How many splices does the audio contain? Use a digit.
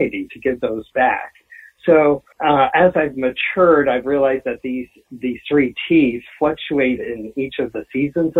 1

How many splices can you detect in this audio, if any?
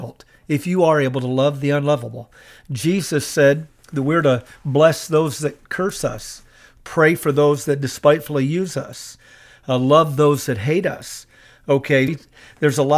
1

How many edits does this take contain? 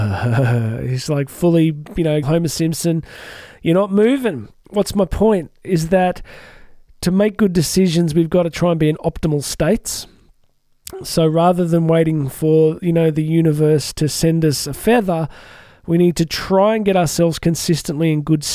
1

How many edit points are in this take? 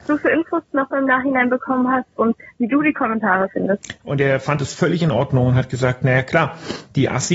1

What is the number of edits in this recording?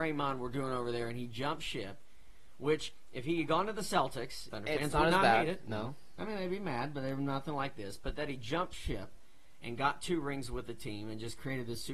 1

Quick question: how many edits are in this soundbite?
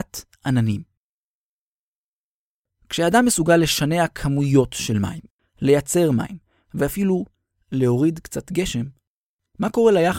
1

